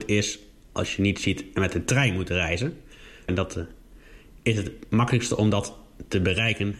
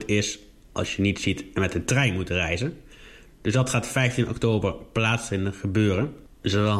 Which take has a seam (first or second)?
first